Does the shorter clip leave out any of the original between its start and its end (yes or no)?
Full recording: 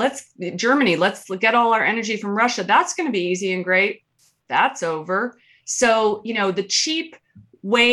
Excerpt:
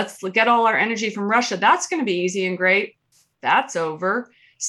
no